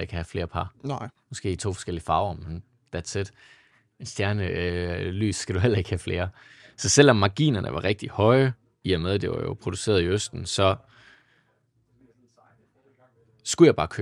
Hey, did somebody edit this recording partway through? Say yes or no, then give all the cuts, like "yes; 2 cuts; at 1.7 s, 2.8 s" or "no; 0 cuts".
no; 0 cuts